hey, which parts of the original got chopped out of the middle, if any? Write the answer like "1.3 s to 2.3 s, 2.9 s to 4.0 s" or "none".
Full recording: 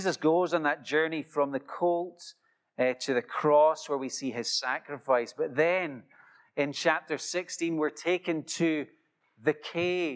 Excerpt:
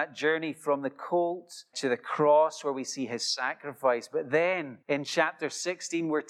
2.4 s to 3.0 s, 6.1 s to 6.5 s